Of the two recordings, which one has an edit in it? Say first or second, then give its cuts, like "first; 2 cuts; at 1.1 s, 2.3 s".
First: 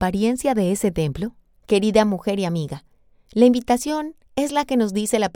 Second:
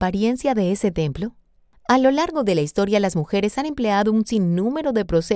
first; 1 cut; at 1.6 s